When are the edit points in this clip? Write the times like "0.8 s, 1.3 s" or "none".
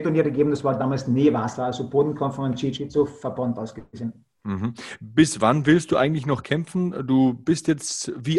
none